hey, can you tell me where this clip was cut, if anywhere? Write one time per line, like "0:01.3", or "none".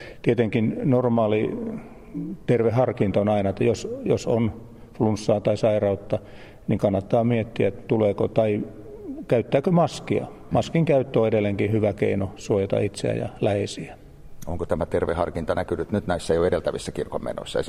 none